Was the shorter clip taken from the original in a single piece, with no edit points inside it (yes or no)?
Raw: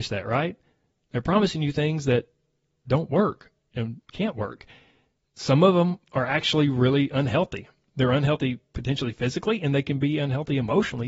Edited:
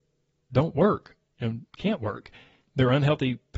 no